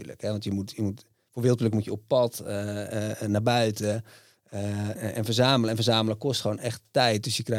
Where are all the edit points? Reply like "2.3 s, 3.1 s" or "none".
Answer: 5.0 s